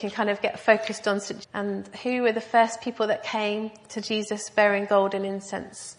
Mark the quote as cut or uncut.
cut